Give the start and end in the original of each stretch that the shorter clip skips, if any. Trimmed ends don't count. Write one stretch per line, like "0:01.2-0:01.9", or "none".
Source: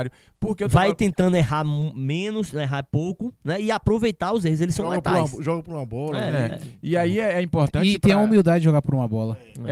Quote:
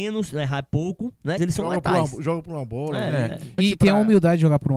0:03.6-0:04.6
0:06.8-0:07.8

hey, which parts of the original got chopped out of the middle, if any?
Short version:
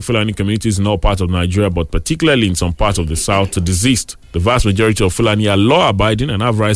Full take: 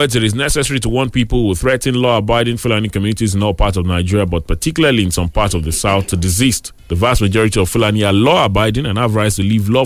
none

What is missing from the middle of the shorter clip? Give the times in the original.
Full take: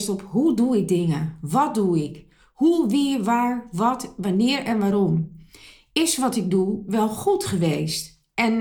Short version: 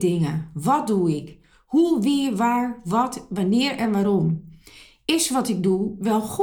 none

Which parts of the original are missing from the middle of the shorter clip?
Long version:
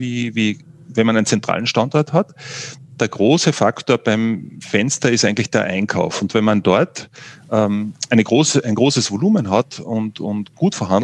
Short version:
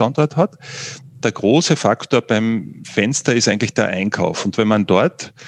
none

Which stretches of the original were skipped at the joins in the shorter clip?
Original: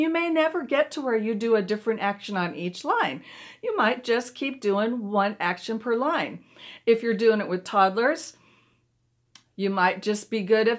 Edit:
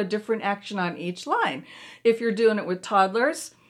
0:03.6-0:06.8

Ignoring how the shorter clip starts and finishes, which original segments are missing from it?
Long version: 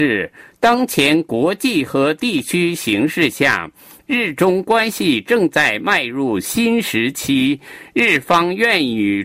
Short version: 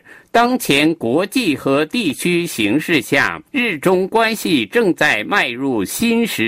0:03.8-0:04.0

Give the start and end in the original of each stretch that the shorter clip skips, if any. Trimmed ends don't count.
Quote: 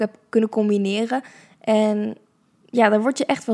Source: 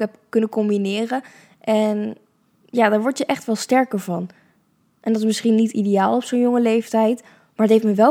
none

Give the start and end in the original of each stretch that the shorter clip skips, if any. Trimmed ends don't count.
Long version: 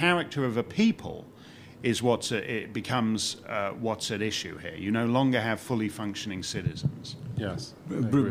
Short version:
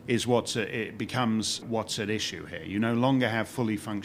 0:03.4-0:03.7

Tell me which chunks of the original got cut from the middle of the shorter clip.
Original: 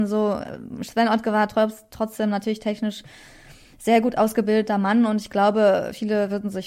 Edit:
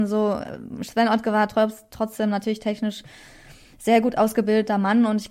none

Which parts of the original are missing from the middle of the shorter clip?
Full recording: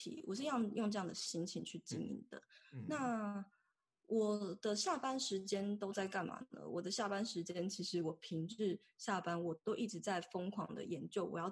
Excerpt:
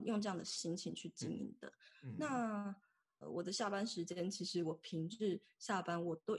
0:03.9-0:06.6

